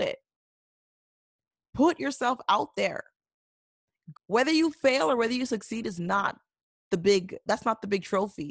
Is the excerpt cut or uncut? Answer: cut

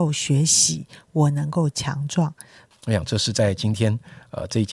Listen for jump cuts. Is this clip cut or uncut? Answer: cut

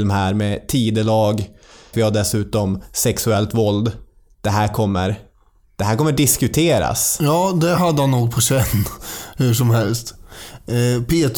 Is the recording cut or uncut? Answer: cut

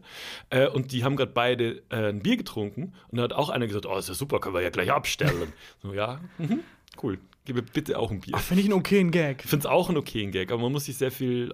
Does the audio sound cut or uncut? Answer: uncut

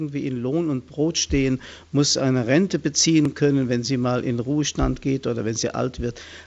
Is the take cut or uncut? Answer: uncut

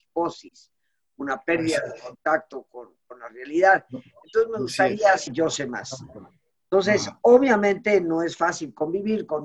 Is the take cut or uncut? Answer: cut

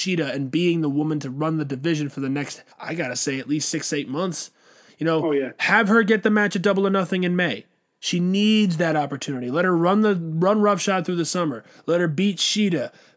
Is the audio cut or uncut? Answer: cut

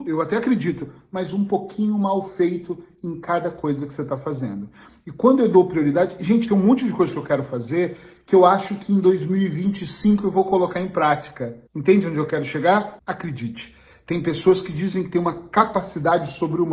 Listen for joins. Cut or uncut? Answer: cut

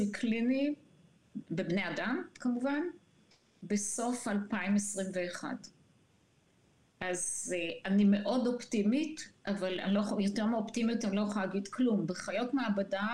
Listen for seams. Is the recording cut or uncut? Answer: uncut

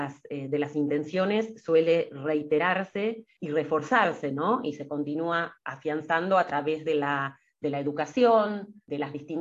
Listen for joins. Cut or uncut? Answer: uncut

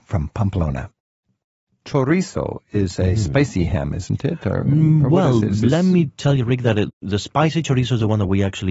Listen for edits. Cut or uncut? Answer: uncut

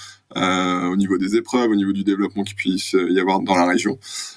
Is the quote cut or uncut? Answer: cut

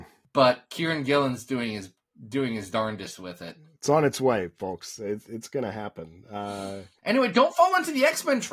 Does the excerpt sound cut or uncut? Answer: uncut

